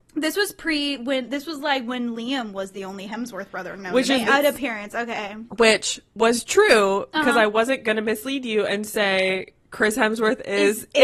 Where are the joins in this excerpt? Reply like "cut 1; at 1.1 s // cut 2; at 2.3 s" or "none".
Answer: cut 1; at 4.3 s // cut 2; at 5.5 s